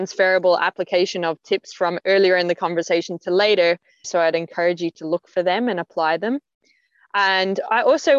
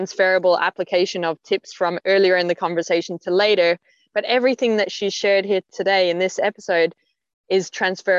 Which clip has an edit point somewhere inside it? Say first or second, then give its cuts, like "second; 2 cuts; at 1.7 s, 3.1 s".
first; 1 cut; at 4.0 s